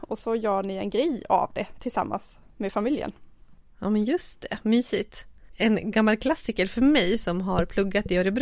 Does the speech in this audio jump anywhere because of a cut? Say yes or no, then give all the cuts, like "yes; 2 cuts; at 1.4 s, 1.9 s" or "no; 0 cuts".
no; 0 cuts